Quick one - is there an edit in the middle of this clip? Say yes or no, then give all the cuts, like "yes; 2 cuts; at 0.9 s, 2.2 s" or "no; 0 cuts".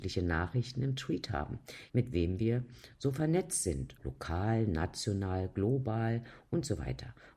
yes; 2 cuts; at 1.9 s, 4.0 s